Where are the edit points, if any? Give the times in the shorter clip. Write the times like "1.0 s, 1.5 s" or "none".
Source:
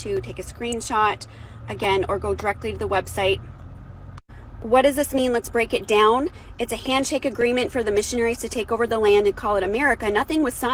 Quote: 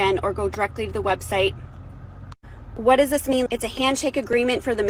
3.5 s